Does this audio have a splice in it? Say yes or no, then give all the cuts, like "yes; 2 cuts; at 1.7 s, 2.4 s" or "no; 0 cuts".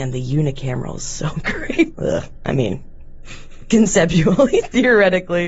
yes; 1 cut; at 1.9 s